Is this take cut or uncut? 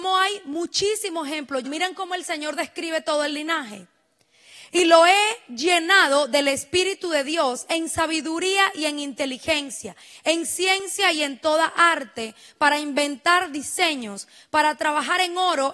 cut